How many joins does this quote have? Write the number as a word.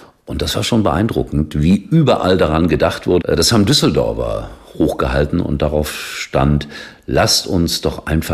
one